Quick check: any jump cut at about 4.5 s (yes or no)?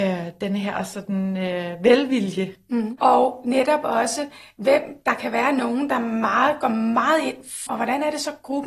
no